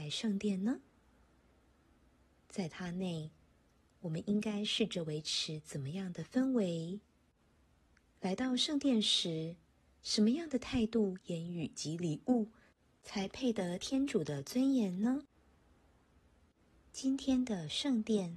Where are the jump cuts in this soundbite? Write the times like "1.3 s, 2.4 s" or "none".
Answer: none

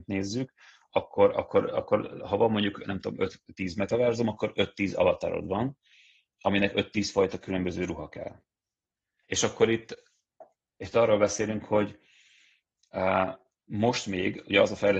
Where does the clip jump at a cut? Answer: 9.2 s

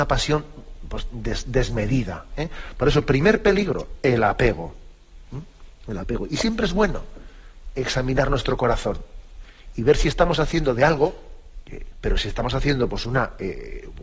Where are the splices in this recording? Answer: 11.9 s

